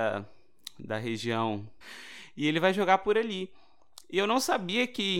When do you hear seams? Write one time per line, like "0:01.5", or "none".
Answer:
0:01.8